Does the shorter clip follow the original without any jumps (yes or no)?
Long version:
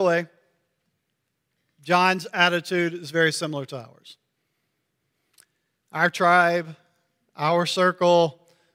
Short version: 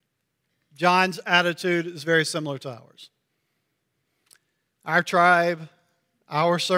yes